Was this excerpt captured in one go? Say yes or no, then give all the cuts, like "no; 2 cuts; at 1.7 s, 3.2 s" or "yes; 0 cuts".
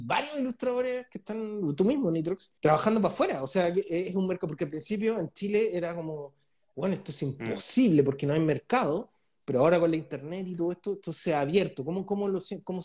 no; 1 cut; at 2.6 s